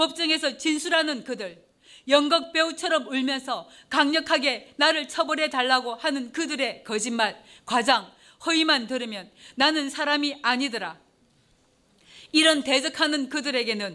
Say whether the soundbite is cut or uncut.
uncut